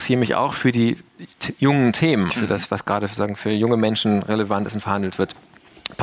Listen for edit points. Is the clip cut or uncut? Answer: cut